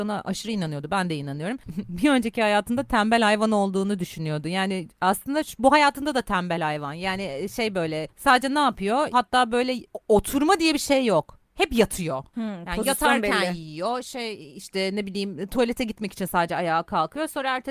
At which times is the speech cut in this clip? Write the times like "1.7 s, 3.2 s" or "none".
9.1 s